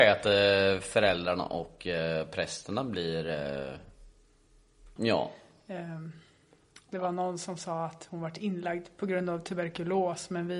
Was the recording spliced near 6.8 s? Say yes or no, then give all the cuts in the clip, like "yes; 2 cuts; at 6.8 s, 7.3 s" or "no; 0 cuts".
no; 1 cut; at 5.0 s